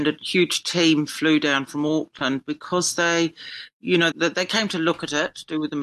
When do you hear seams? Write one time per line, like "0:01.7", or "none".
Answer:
0:04.1